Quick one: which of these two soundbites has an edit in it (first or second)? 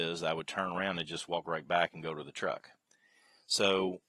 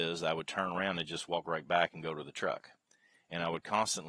second